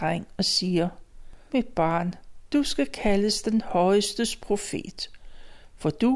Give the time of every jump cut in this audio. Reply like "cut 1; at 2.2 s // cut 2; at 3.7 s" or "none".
cut 1; at 1.5 s